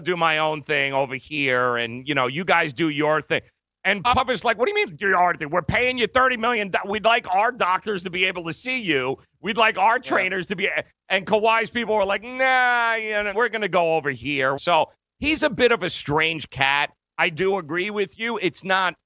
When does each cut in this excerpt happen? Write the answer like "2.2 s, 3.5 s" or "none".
13.3 s, 14.6 s